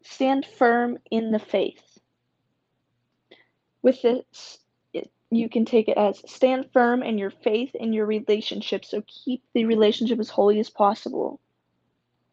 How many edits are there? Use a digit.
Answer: 1